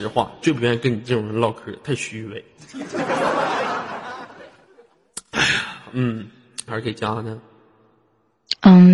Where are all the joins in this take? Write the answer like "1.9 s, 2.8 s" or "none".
6.7 s